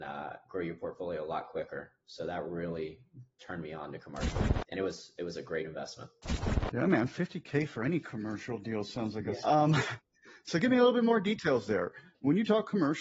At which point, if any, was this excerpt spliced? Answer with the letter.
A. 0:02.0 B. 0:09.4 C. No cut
B